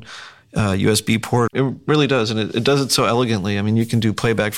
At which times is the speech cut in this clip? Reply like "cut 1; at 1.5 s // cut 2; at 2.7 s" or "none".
cut 1; at 1.5 s